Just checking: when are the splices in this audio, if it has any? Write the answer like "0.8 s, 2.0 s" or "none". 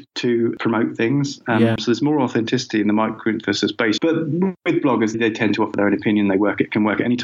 1.8 s, 4.0 s, 5.1 s